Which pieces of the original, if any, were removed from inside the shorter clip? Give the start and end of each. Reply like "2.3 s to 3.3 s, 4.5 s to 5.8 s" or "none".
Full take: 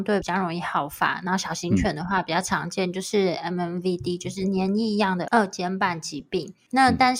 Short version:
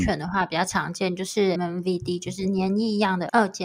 3.3 s to 3.5 s